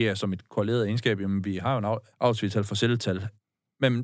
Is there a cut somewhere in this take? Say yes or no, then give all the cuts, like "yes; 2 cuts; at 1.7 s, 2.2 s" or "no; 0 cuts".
yes; 1 cut; at 2.1 s